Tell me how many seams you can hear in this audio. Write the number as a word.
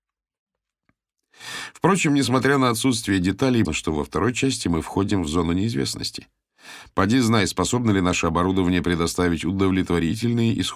one